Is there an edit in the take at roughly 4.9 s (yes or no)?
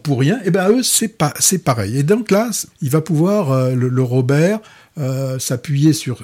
no